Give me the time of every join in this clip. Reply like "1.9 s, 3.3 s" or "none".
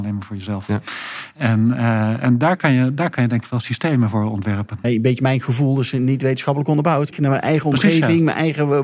4.8 s, 7.1 s

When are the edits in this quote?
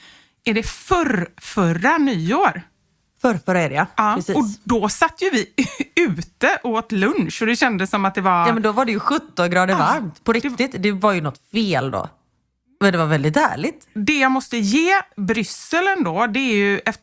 none

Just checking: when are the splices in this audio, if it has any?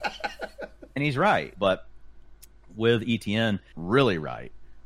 1.5 s, 3.7 s

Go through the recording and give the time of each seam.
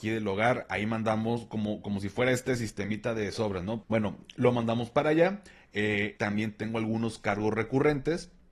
3.8 s, 6.2 s

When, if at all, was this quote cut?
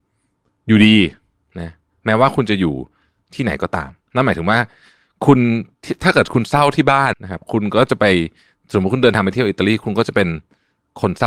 7.1 s

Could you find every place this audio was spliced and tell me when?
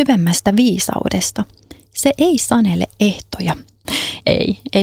3.8 s

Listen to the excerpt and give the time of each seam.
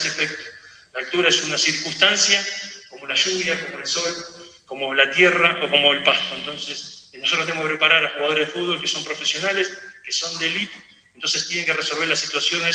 none

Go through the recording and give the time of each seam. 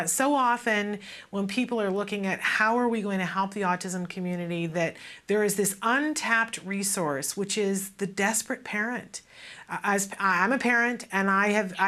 none

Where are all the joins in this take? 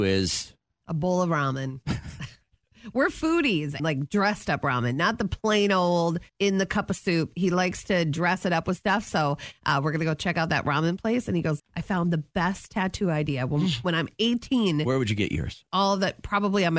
3.8 s, 6.3 s, 11.6 s

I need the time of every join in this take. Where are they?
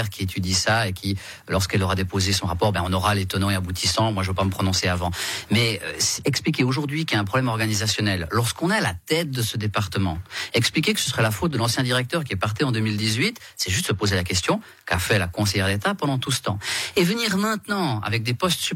none

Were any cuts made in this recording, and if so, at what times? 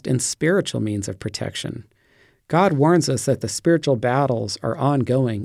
none

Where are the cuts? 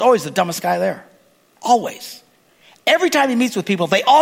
none

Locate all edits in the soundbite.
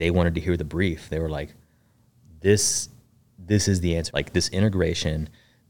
4.1 s

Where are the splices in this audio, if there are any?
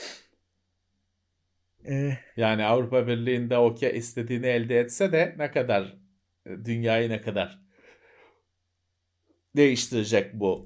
none

